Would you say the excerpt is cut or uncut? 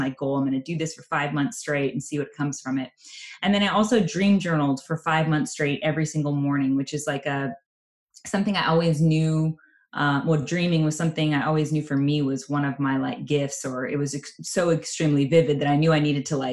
uncut